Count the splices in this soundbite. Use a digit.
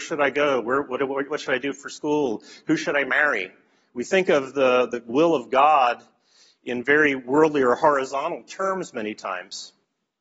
0